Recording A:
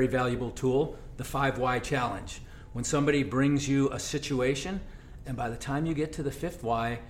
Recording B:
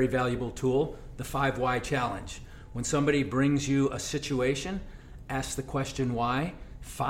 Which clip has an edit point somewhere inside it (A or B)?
A